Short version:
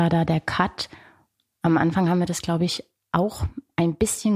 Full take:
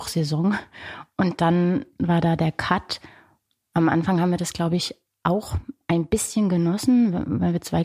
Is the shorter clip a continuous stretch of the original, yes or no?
yes